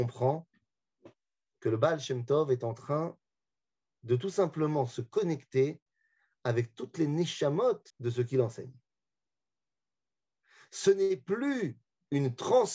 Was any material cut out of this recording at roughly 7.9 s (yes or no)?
yes